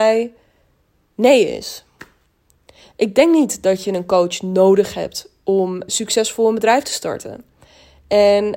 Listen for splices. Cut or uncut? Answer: cut